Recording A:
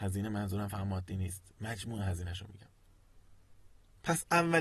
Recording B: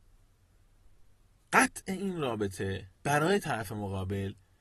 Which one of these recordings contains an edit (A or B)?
B